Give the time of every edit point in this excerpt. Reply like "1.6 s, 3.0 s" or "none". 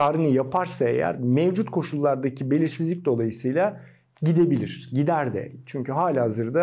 none